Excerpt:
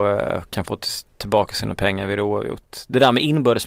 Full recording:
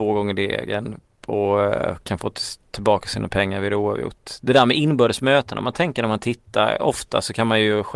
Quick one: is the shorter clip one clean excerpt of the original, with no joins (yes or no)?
yes